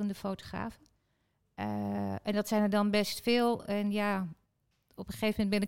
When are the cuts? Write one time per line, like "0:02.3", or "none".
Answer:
none